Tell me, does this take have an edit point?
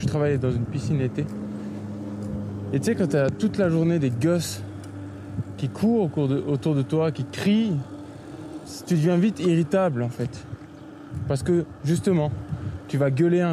no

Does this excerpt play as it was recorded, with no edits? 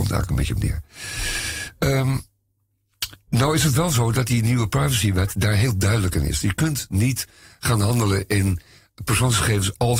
yes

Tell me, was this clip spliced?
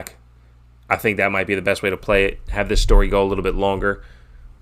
no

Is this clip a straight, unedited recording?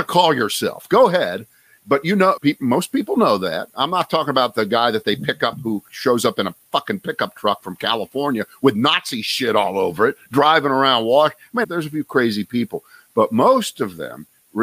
no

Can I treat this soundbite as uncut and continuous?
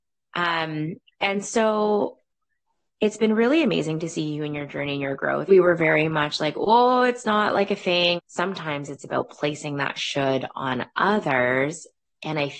no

